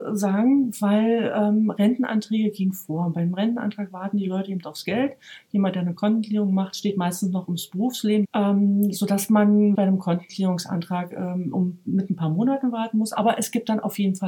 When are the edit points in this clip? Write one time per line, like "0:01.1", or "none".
0:08.2
0:09.7